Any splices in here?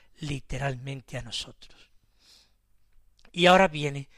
no; 0 cuts

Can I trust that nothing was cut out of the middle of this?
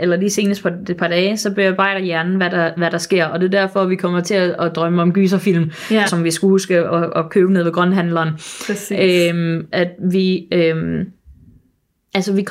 no; 2 cuts; at 6.1 s, 9.7 s

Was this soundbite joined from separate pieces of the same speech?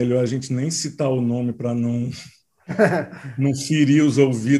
no; 0 cuts

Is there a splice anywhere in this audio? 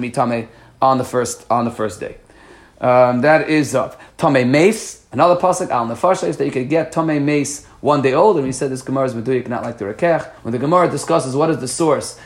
yes; 2 cuts; at 4.1 s, 10.4 s

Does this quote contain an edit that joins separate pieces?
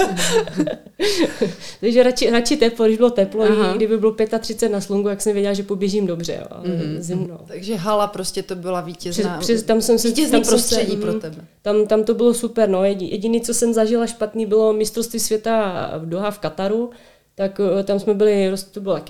yes; 1 cut; at 7.2 s

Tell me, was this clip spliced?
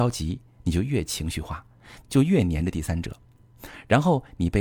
yes; 1 cut; at 2.0 s

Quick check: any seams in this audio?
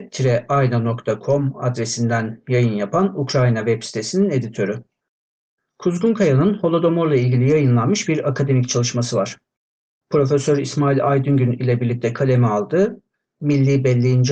no; 0 cuts

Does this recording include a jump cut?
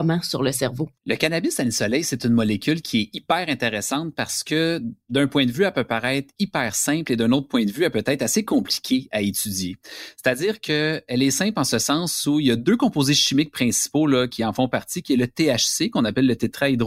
yes; 1 cut; at 1.0 s

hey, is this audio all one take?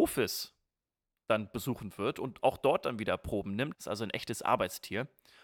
no; 1 cut; at 3.7 s

